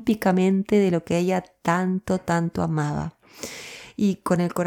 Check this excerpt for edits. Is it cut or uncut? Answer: uncut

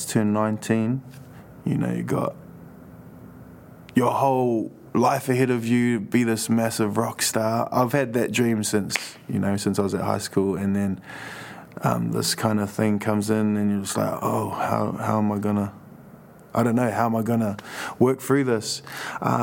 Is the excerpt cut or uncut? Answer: uncut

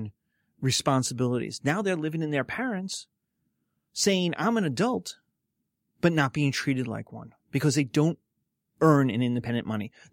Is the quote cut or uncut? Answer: uncut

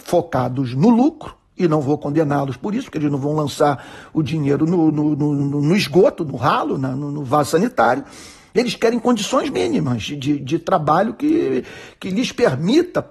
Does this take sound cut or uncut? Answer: uncut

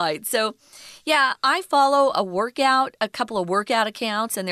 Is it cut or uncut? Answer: uncut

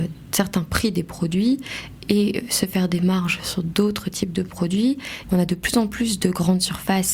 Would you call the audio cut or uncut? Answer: cut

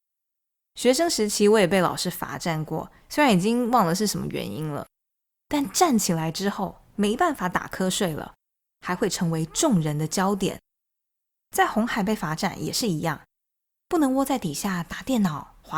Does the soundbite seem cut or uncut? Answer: uncut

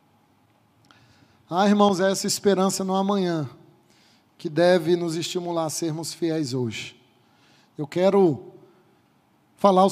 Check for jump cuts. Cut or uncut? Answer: uncut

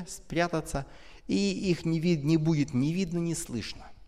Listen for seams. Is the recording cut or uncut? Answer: uncut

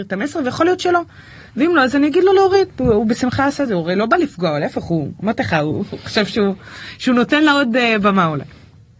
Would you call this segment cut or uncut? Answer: uncut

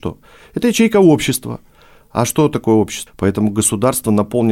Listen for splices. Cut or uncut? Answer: cut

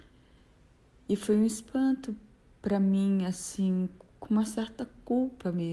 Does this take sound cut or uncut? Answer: cut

